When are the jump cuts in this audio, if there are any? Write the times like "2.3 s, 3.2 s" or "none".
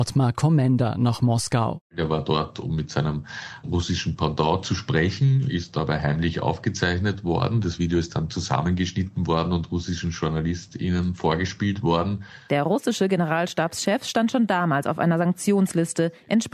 none

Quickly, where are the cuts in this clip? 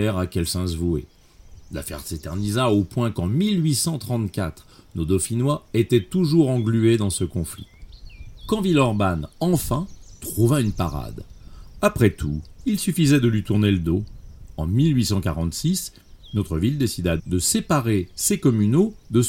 12.6 s, 17.2 s

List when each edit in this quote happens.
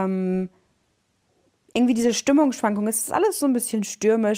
none

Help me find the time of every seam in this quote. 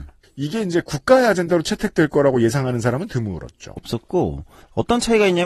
3.8 s

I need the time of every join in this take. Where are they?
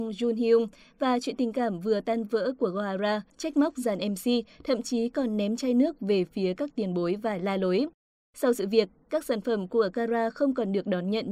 3.3 s

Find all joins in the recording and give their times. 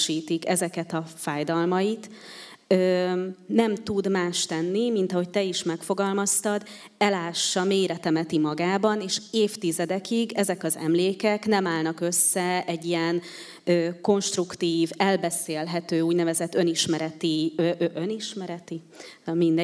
none

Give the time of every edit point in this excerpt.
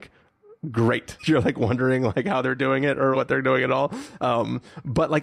1.2 s, 3.1 s

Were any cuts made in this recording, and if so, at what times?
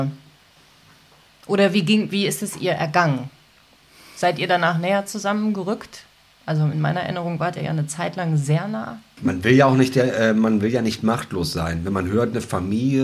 9.2 s

